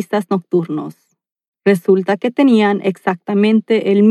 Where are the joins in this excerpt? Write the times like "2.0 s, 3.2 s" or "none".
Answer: none